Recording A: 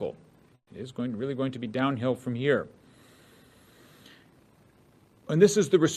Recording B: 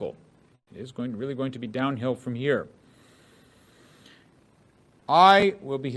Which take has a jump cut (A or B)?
B